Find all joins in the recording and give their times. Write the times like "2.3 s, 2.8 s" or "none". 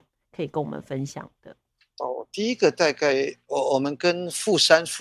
none